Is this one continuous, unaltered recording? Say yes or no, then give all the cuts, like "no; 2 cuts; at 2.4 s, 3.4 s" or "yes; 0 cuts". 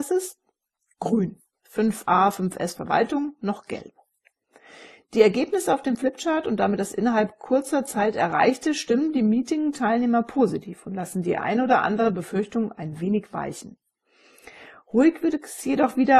no; 1 cut; at 1.6 s